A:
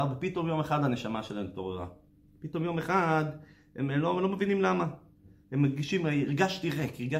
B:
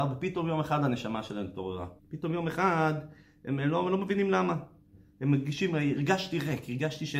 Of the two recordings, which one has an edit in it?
B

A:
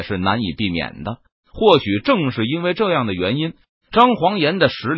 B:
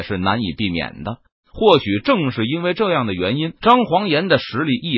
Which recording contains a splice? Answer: B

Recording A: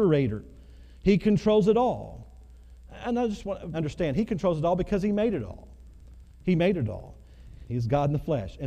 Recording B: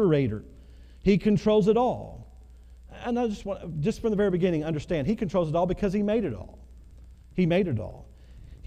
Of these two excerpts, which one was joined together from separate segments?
A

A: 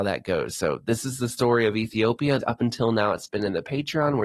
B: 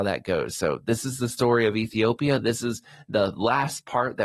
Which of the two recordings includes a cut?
A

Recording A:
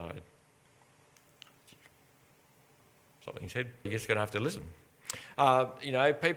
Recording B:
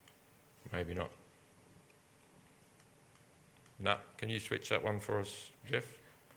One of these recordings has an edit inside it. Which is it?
A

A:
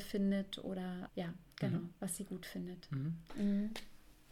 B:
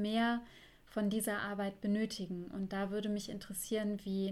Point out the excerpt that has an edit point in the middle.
A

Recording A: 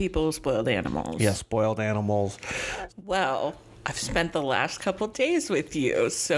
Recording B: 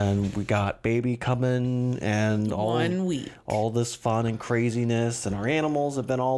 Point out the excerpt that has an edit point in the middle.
A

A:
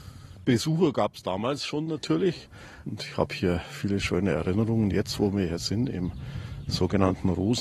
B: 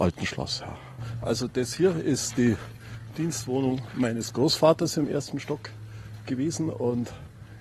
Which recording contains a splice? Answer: A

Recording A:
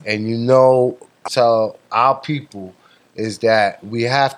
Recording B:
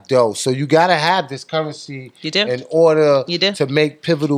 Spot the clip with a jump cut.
A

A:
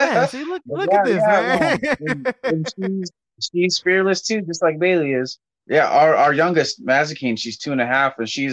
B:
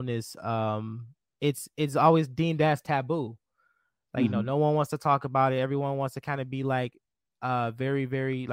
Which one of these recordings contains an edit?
A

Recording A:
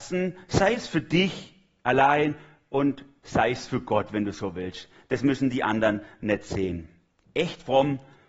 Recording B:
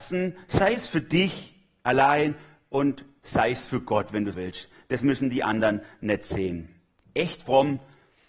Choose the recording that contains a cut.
B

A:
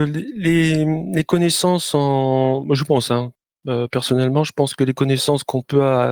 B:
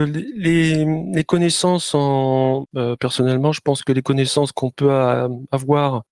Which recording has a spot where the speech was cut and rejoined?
B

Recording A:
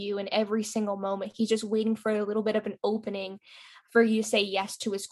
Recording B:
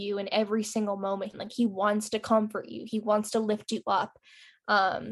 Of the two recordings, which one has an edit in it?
B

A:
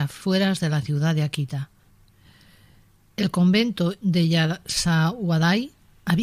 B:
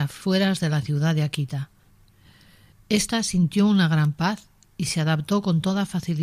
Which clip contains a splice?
B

